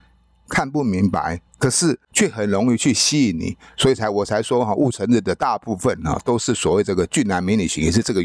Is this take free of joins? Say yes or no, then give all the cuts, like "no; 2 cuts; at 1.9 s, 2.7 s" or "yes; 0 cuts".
no; 1 cut; at 1.5 s